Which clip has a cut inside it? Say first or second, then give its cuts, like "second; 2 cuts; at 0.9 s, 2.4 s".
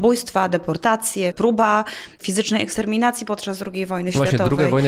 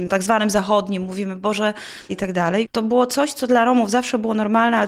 second; 1 cut; at 2.1 s